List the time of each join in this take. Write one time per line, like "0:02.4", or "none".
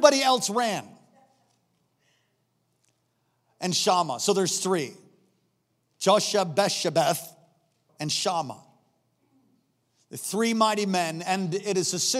0:07.9

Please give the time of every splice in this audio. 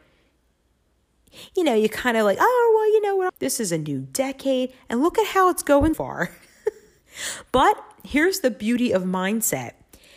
0:03.3
0:05.9

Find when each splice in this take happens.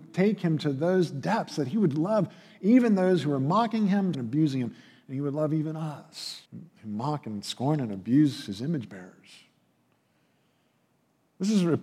0:04.1
0:06.5

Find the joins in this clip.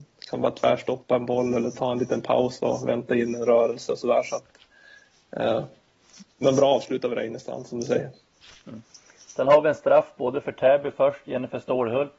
none

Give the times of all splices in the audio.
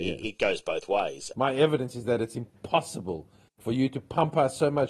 0:01.3

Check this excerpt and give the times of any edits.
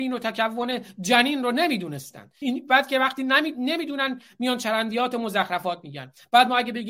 0:02.4

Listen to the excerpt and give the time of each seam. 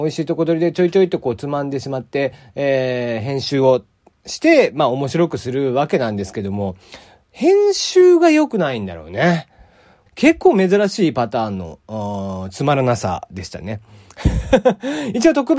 0:10.1

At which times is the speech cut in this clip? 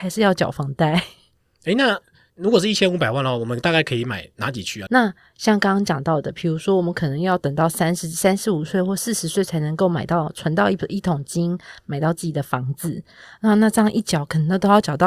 0:04.9

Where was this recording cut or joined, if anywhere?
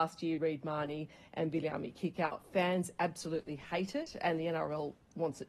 none

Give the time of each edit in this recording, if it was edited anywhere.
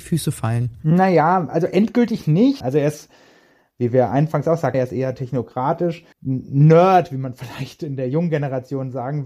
0:02.6
0:04.7
0:06.1

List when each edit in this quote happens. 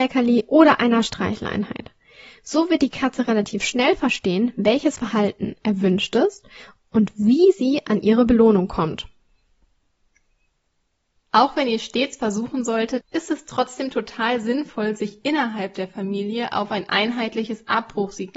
0:11.2
0:13.0

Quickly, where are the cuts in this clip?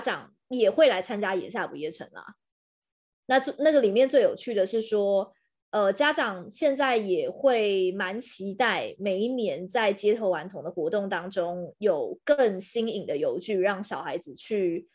0:03.2
0:13.5

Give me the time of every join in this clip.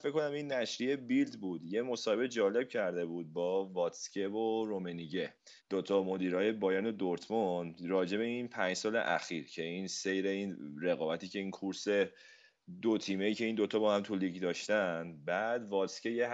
0:05.6

